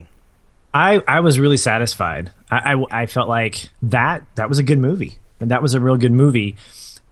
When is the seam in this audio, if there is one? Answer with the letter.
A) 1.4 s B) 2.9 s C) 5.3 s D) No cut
B